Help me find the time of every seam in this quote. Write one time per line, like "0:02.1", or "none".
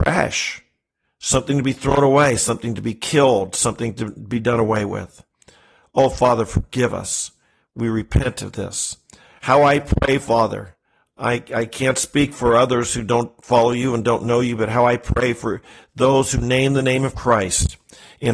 none